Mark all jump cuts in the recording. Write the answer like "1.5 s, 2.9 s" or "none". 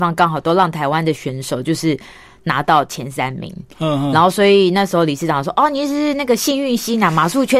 none

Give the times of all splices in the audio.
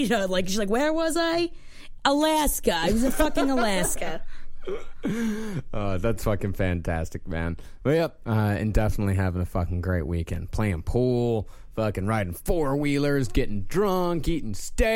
8.3 s

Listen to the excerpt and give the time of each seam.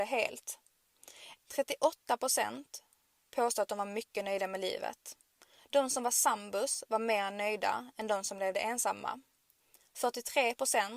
1.4 s

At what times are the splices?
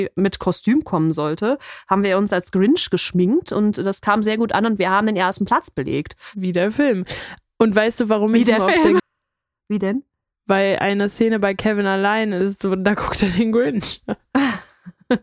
9.0 s

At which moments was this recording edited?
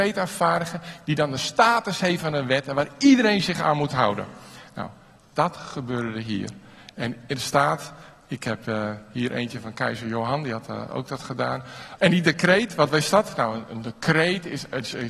12.0 s

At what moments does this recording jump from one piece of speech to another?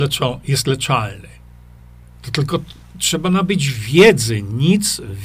none

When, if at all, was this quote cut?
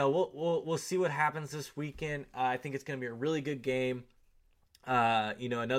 none

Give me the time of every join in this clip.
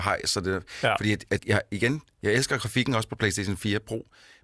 1.4 s

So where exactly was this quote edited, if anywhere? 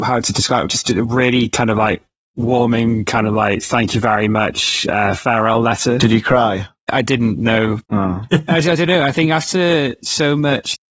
none

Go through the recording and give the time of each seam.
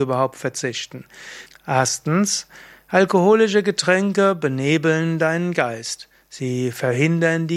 1.5 s

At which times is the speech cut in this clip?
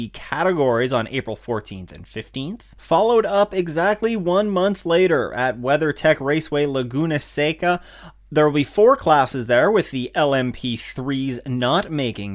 none

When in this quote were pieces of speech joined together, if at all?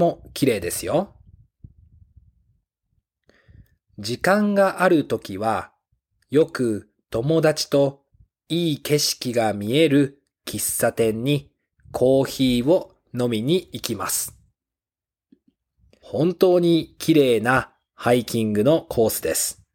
16.0 s

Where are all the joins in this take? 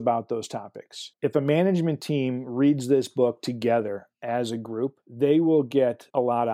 1.1 s

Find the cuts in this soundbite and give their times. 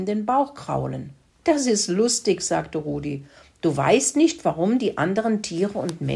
1.3 s

